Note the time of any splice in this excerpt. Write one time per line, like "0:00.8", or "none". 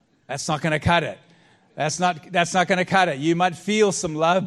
none